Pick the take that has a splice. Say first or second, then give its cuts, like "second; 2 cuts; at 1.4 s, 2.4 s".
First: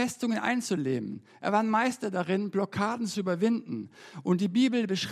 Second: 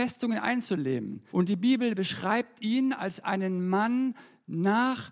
second; 1 cut; at 1.3 s